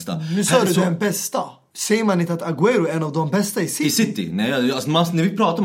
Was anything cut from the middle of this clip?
yes; 1 cut; at 1.7 s

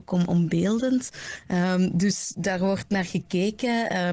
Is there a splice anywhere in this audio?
no; 0 cuts

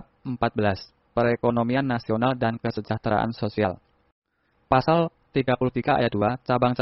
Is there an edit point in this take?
yes; 1 cut; at 4.5 s

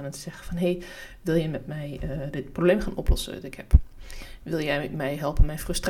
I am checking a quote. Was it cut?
no; 0 cuts

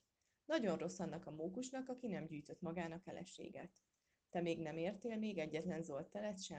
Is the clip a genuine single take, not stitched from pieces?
yes; 0 cuts

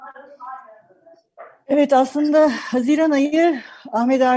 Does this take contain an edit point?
no; 0 cuts

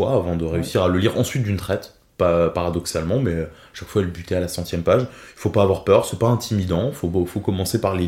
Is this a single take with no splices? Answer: yes; 0 cuts

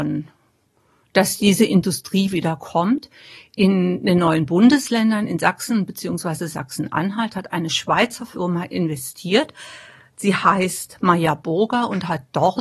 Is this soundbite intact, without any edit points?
yes; 0 cuts

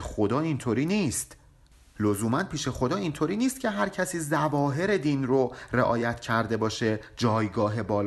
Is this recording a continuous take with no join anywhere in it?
yes; 0 cuts

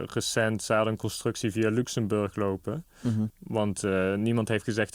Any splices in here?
yes; 1 cut; at 3.3 s

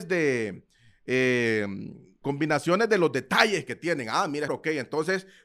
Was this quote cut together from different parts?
yes; 2 cuts; at 2.2 s, 4.5 s

